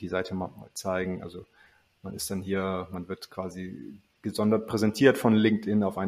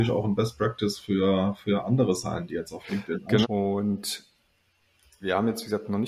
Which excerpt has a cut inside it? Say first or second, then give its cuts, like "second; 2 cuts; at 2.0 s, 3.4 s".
second; 1 cut; at 3.4 s